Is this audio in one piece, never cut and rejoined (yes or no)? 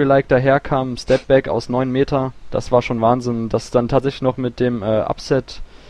yes